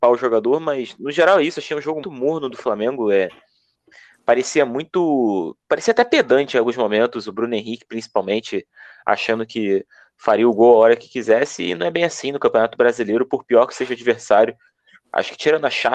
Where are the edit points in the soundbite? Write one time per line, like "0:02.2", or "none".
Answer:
0:02.0